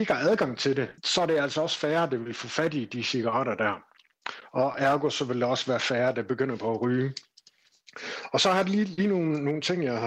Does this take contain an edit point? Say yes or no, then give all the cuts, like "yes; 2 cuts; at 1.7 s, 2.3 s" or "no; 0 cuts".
yes; 1 cut; at 1.0 s